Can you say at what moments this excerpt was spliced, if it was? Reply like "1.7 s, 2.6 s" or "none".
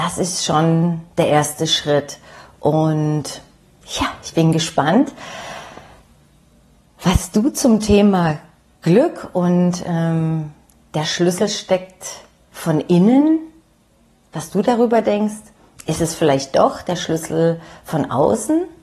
none